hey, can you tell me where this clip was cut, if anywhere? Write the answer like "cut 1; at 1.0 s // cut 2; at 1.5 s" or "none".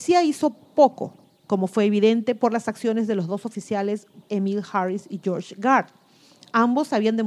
cut 1; at 4.3 s